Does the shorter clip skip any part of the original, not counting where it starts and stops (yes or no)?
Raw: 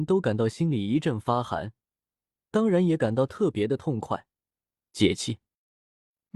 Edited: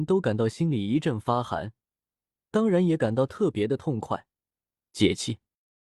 no